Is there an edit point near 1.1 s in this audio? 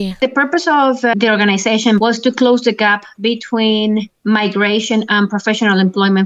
yes; 1 cut; at 1.1 s

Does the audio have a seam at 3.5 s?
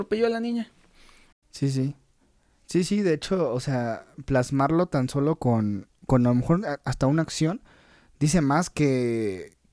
no; 1 cut; at 1.3 s

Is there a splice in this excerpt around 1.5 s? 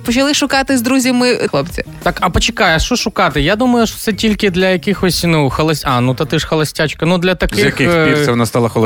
yes; 1 cut; at 1.5 s

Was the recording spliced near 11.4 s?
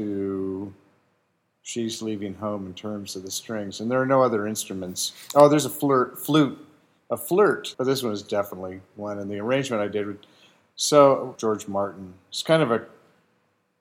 yes; 2 cuts; at 7.7 s, 11.4 s

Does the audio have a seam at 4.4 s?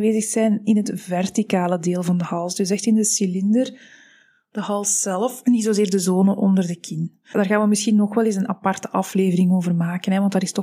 no; 0 cuts

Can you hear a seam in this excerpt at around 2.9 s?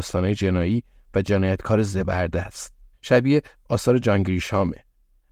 yes; 1 cut; at 2.9 s

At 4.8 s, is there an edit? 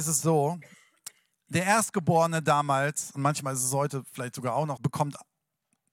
yes; 1 cut; at 4.8 s

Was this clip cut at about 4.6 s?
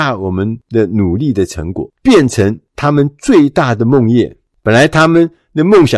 no; 1 cut; at 1.9 s

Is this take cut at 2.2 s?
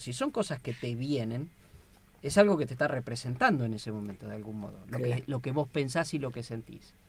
no; 0 cuts

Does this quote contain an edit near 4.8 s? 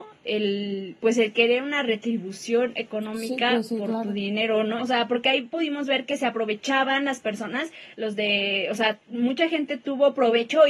yes; 2 cuts; at 4.8 s, 7.9 s

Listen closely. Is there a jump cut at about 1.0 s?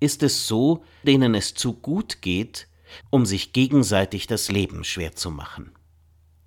yes; 2 cuts; at 1.0 s, 3.0 s

